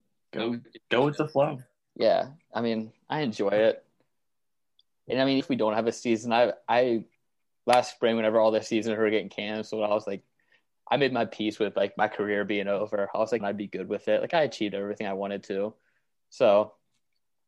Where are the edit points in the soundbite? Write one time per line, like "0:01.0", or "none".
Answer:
0:05.4
0:13.4